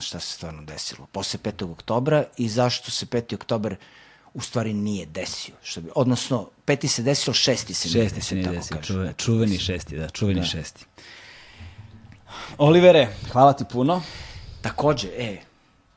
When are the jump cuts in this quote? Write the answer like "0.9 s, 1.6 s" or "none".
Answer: none